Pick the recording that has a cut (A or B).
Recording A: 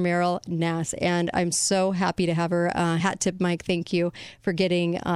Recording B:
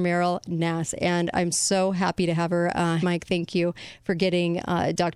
B